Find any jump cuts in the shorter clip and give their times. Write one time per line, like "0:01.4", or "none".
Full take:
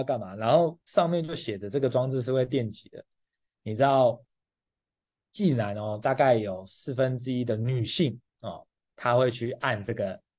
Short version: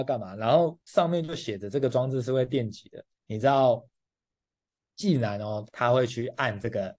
0:03.1
0:05.7